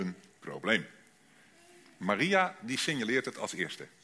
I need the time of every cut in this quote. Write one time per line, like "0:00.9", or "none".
none